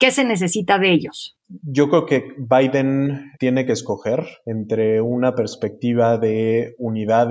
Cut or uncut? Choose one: cut